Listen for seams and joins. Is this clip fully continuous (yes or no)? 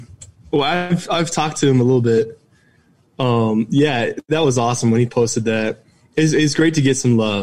yes